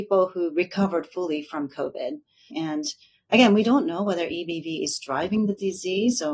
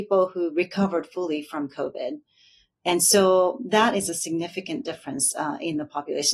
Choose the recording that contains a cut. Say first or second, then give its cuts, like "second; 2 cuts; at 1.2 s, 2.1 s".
first; 1 cut; at 2.5 s